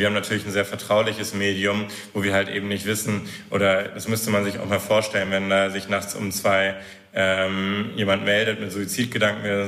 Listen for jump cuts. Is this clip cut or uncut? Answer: uncut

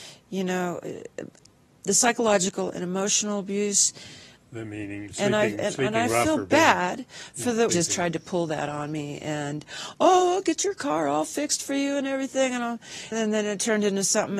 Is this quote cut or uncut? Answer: cut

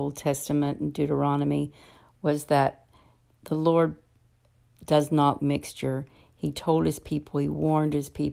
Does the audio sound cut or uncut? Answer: cut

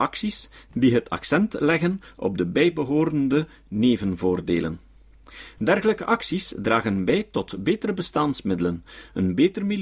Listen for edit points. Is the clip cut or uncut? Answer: uncut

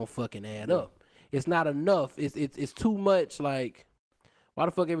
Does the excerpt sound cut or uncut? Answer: uncut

